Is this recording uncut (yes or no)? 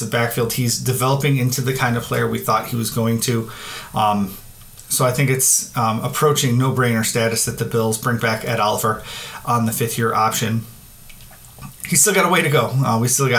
yes